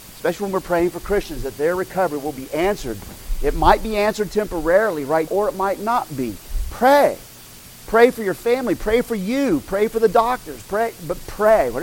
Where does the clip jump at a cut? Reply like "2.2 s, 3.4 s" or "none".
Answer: 5.3 s, 6.7 s